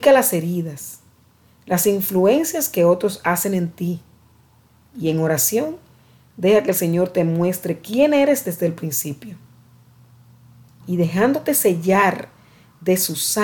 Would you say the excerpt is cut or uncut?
cut